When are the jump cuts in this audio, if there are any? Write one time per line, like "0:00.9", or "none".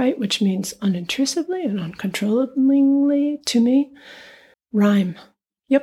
0:04.5